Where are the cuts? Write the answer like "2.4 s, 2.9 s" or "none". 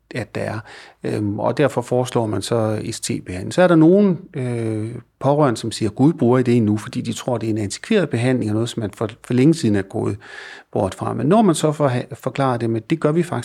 none

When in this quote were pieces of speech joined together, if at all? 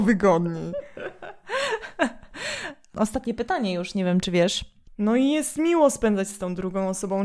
4.9 s

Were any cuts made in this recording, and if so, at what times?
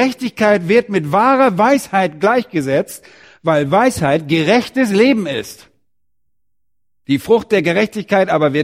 none

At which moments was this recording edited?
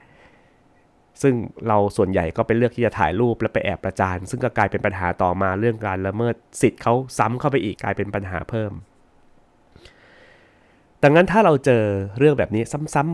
7.7 s

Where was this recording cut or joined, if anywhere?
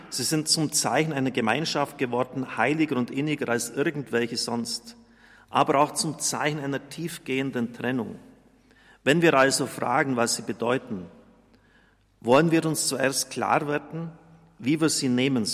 none

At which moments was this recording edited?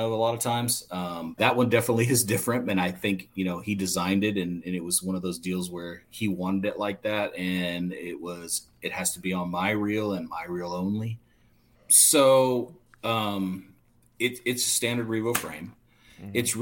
1.4 s, 11.7 s

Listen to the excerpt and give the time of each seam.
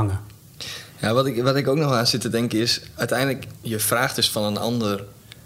3.6 s

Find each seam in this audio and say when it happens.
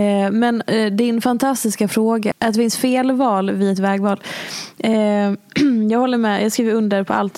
2.3 s

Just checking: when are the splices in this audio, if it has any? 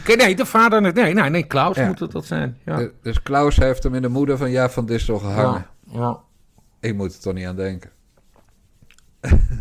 none

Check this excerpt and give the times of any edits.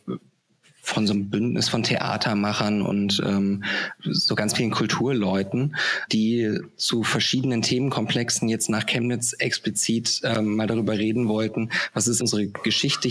6.1 s, 12.2 s

